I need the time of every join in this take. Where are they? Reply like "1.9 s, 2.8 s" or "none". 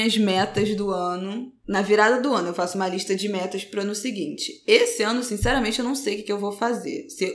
none

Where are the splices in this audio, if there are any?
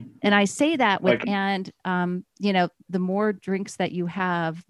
1.2 s, 2.9 s

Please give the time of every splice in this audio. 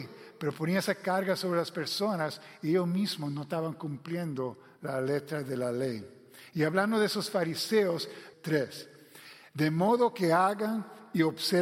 8.3 s

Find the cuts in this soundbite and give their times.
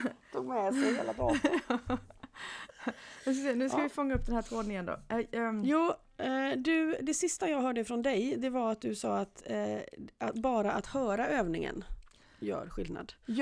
none

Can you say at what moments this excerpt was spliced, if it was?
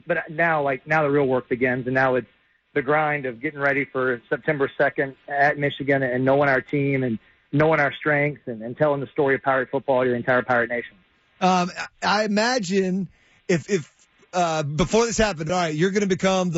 13.6 s, 15.5 s

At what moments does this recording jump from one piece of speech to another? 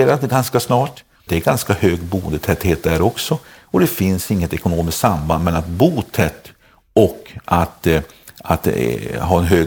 1.3 s

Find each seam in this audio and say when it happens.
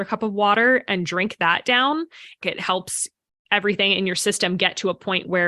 2.4 s

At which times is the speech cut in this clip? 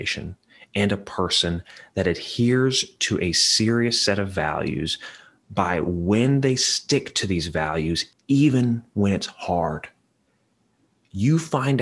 8.1 s

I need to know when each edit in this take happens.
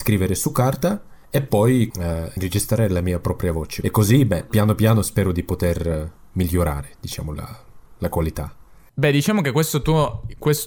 1.9 s

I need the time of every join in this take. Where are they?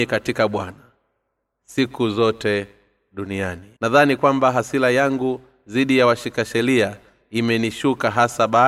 3.8 s

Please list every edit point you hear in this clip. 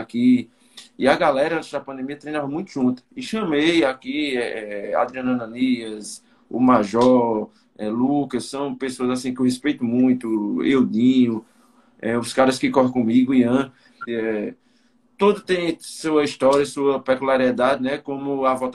14.1 s

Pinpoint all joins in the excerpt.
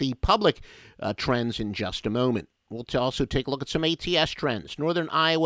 none

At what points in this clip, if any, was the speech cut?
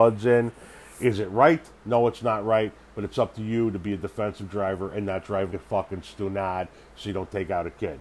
5.5 s

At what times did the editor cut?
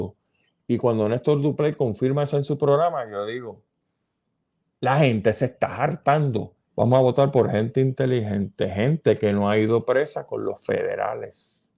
6.7 s

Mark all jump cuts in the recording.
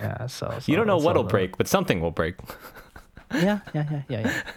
none

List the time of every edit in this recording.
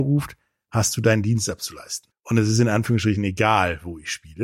2.1 s

